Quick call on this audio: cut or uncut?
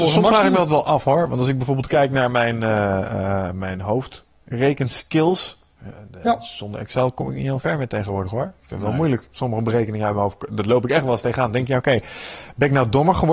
uncut